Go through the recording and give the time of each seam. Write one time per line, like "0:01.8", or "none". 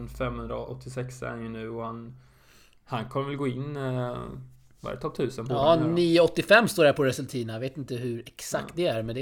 none